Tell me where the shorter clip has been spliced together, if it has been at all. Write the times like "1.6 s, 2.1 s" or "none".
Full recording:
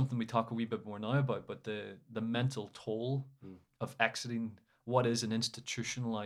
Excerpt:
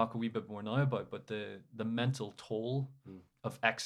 none